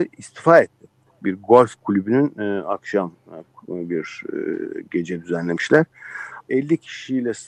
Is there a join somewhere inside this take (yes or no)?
yes